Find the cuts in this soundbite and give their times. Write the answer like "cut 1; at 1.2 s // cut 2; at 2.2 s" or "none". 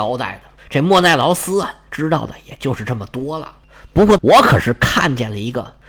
cut 1; at 4.2 s